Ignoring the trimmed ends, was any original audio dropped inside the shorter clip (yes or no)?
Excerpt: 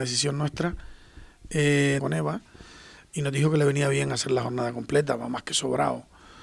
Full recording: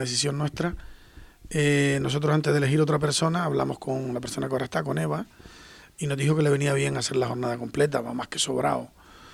yes